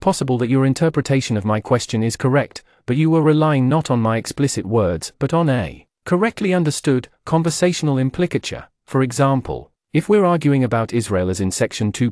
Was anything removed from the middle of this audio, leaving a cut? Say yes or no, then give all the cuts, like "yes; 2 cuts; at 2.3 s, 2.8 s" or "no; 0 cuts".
no; 0 cuts